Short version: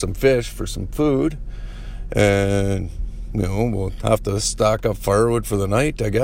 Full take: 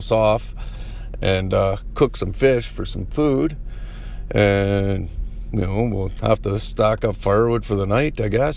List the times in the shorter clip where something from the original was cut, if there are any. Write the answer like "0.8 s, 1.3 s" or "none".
none